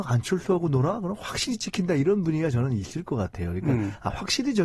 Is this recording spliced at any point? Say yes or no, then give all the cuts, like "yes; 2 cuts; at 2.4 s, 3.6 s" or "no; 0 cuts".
no; 0 cuts